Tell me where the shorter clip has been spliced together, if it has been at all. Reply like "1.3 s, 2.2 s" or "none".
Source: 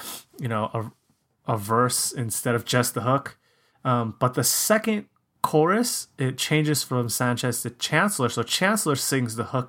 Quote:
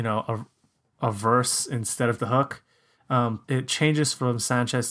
2.2 s, 3.4 s